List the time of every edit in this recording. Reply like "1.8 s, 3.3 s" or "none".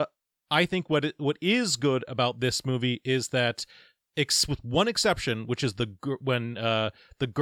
none